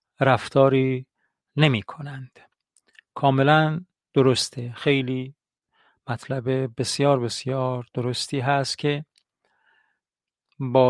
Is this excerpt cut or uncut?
uncut